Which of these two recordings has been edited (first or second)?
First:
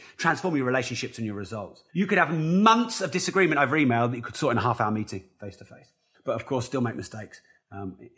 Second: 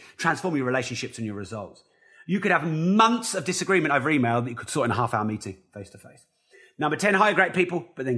first